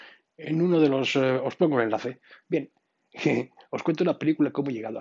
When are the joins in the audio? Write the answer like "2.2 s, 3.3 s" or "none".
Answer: 2.4 s